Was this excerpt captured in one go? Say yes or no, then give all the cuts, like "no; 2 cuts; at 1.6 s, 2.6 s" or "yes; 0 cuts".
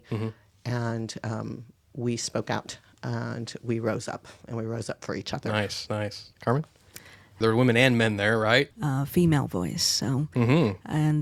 no; 2 cuts; at 7.4 s, 8.7 s